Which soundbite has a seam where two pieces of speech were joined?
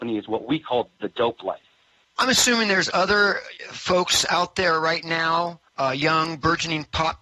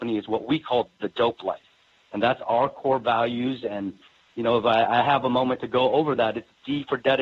first; 2 cuts; at 2.0 s, 5.7 s

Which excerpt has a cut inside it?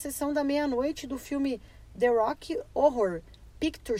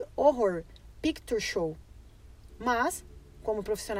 second; 1 cut; at 2.5 s

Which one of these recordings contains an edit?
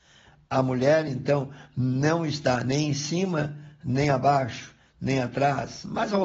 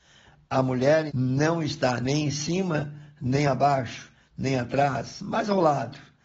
second; 1 cut; at 1.1 s

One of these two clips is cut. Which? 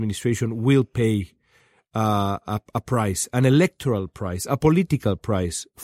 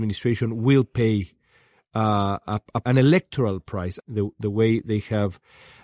second; 2 cuts; at 2.8 s, 4.0 s

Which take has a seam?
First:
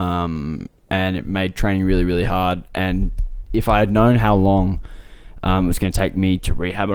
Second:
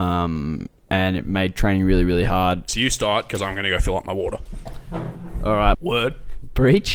second; 2 cuts; at 2.7 s, 5.7 s

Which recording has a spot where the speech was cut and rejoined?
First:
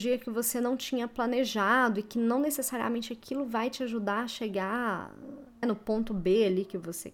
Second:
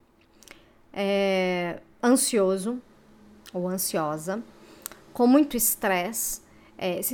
first; 1 cut; at 5.6 s

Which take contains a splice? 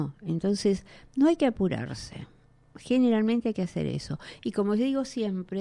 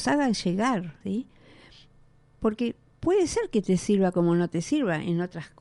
second; 1 cut; at 1.0 s

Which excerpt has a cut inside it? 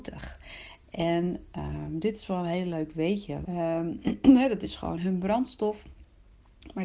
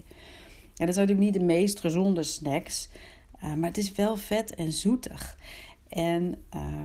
first; 2 cuts; at 3.4 s, 5.0 s

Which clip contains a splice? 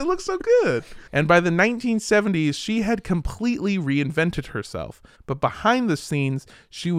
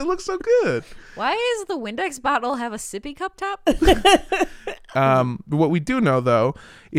first; 2 cuts; at 1.1 s, 5.1 s

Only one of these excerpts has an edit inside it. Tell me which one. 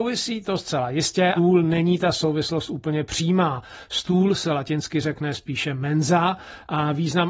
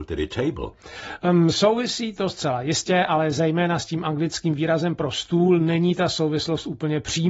first; 1 cut; at 1.4 s

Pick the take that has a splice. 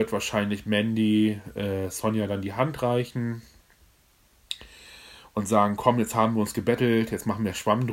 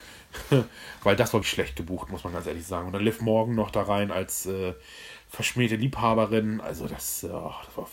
second; 1 cut; at 1.4 s

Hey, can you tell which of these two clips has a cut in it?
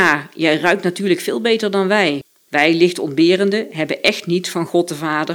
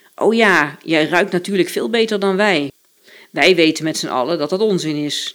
first; 1 cut; at 2.5 s

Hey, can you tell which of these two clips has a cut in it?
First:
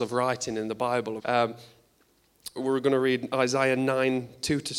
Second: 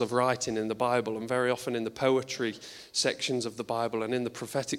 first; 2 cuts; at 1.2 s, 2.6 s

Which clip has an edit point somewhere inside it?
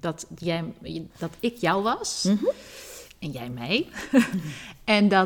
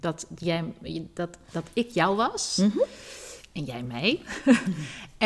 first; 1 cut; at 1.1 s

